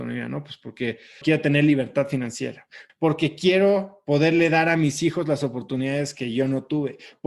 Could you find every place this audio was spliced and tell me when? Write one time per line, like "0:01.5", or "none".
0:01.2
0:02.9